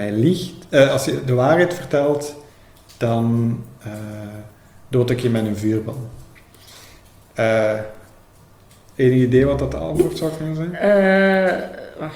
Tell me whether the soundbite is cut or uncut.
uncut